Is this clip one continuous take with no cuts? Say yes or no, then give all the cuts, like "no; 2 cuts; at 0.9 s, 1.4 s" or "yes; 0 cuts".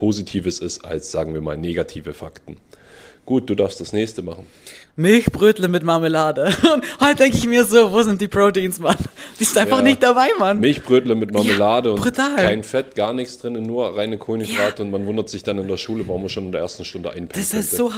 no; 1 cut; at 4.9 s